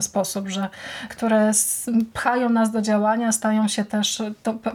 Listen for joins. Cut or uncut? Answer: cut